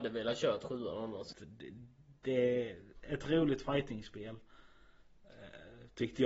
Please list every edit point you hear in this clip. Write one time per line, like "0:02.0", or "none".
0:01.3

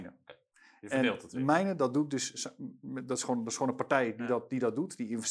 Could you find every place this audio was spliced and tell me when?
none

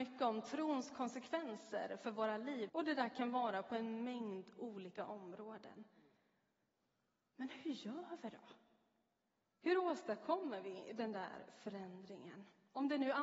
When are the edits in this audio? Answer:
0:02.7

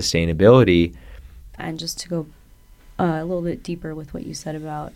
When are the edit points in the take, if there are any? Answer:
0:01.6

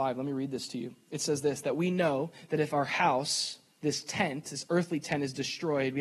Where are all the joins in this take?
none

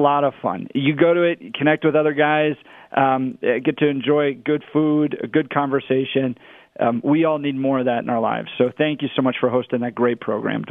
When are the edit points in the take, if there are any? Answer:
none

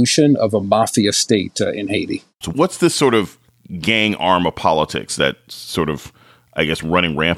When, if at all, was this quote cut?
0:02.4

